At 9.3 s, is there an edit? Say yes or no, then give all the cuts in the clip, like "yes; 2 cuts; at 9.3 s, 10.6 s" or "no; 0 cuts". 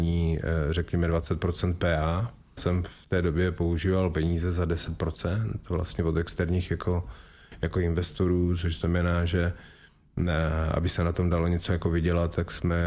no; 1 cut; at 2.6 s